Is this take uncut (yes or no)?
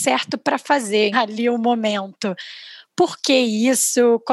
no